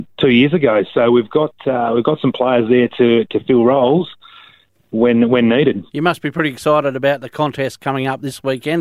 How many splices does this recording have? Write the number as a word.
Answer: one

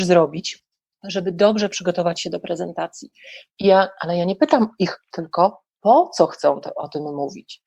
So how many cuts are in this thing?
two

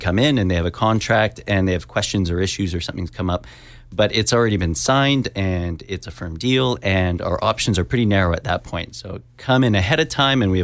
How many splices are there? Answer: zero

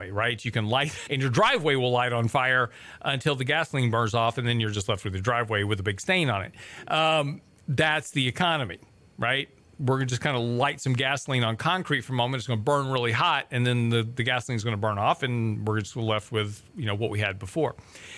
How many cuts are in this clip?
one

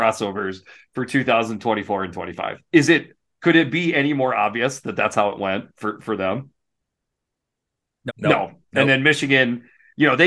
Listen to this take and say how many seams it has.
one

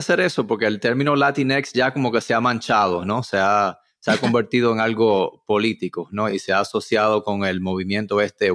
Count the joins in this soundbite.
zero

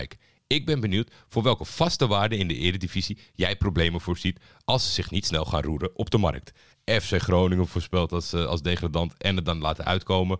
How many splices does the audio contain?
one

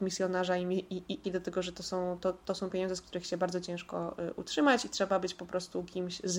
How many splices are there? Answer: one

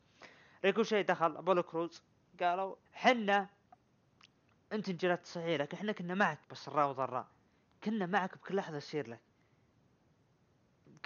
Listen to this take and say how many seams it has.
two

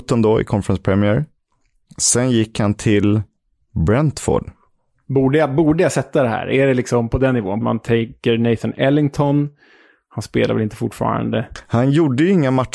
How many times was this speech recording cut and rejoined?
one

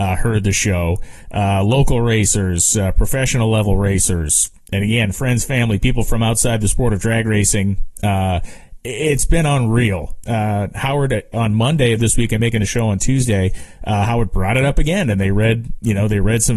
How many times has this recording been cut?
one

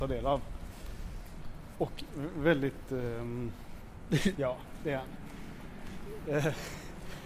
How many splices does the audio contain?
one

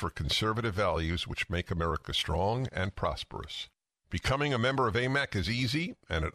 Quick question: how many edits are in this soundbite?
zero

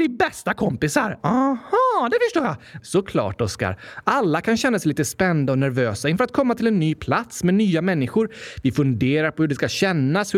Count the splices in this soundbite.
two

